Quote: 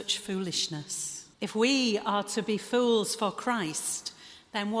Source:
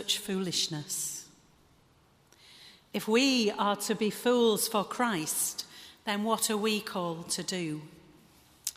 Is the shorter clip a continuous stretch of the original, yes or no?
no